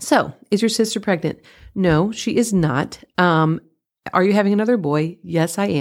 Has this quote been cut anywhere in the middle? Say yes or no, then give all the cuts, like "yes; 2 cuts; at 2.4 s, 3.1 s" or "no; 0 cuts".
no; 0 cuts